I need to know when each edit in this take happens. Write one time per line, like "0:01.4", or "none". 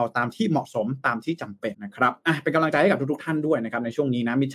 0:01.7